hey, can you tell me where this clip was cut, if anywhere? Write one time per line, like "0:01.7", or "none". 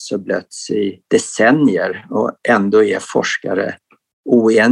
0:01.0